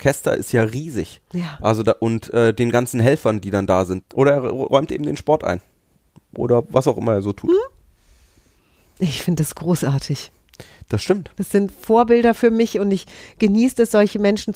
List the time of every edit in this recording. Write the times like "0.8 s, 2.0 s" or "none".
4.0 s